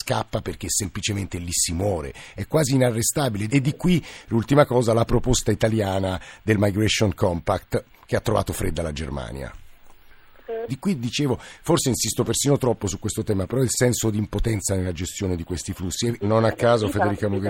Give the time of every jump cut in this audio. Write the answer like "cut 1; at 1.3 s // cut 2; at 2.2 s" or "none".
cut 1; at 3.5 s // cut 2; at 10.7 s // cut 3; at 16.2 s